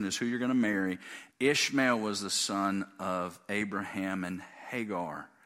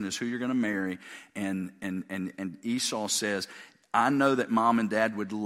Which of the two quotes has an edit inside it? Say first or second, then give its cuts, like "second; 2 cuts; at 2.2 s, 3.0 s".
first; 1 cut; at 1.3 s